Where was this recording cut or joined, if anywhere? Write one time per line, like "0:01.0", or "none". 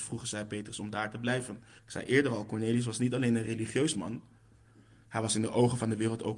0:01.8